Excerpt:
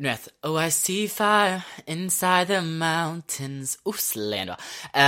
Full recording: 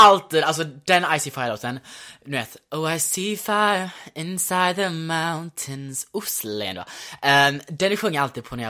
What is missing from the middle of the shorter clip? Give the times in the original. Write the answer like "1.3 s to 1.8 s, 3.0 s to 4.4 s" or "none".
none